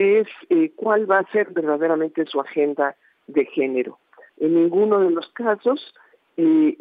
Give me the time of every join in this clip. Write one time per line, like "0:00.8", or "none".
0:04.3